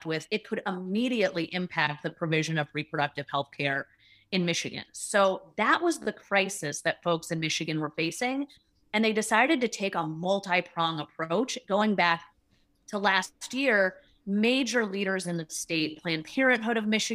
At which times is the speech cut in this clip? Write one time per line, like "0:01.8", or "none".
none